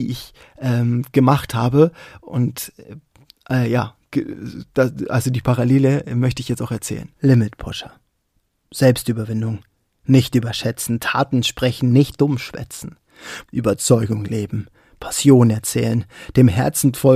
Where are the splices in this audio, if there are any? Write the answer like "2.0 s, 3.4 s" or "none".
7.1 s, 13.4 s

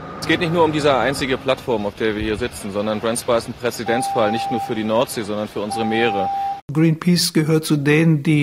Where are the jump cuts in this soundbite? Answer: 6.6 s

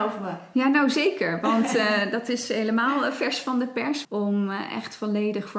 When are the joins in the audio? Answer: 4.0 s

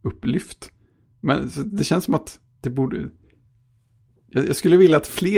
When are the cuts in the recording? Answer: none

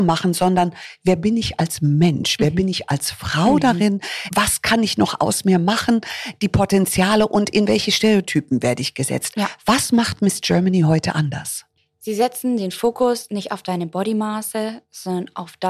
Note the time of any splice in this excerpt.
none

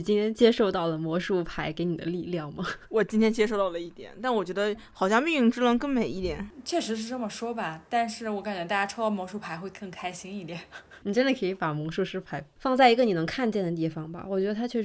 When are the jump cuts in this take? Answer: 11.0 s

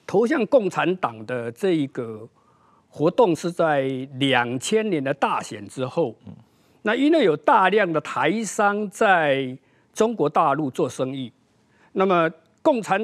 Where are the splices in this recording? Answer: none

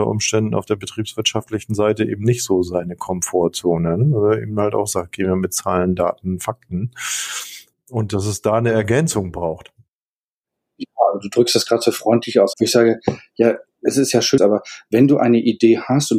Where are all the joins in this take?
12.5 s, 14.4 s

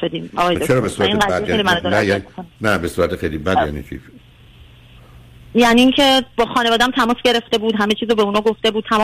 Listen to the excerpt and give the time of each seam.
none

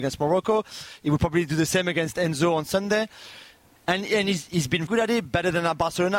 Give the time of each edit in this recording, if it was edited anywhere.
3.8 s, 4.9 s

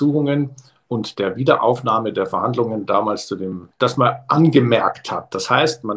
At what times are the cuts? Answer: 3.7 s

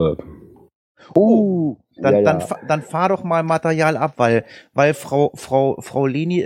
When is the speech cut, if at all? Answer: 2.0 s

